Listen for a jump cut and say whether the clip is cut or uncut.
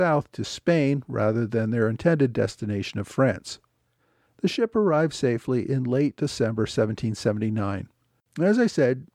cut